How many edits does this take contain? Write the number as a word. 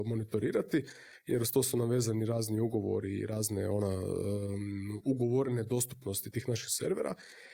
one